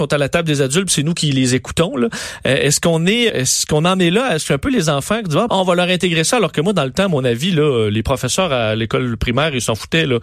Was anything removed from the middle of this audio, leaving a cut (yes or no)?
yes